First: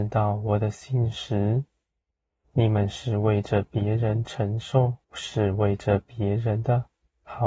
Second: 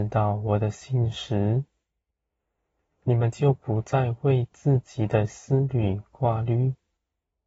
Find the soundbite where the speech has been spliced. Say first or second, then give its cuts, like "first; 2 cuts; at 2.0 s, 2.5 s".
first; 2 cuts; at 2.4 s, 5.0 s